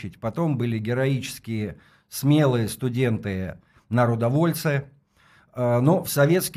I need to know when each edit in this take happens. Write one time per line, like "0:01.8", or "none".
none